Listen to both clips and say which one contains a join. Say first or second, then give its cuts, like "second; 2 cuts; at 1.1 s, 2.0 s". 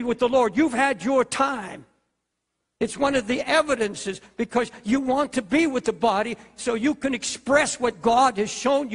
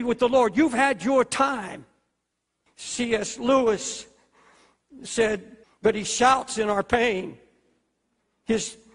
second; 2 cuts; at 2.7 s, 5.6 s